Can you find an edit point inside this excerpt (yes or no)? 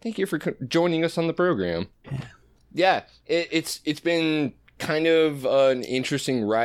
yes